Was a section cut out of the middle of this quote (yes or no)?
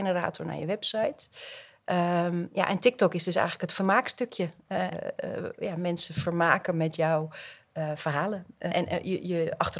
yes